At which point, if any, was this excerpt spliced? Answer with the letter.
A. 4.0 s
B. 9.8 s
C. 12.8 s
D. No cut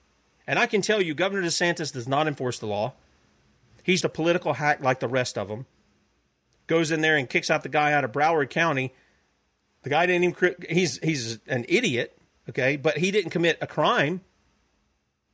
A